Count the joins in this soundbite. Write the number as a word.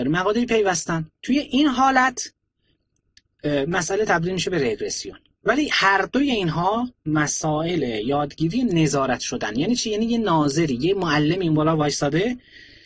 one